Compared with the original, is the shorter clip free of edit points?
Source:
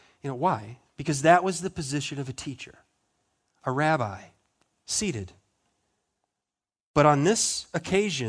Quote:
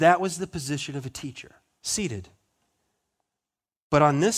no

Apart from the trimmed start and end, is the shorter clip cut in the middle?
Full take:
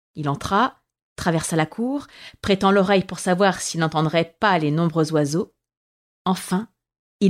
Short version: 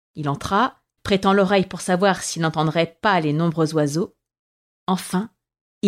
yes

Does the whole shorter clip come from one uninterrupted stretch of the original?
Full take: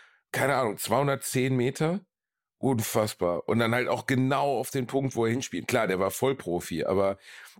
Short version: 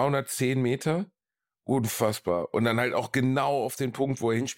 yes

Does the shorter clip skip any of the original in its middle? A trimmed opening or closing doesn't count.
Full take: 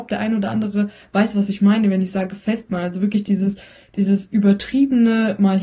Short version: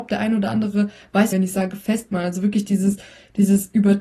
yes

